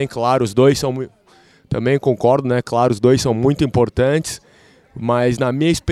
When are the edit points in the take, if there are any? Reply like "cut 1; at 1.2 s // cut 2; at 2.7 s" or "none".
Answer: none